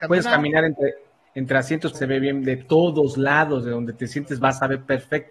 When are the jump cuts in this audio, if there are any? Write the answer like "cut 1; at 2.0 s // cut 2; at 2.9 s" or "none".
cut 1; at 1.9 s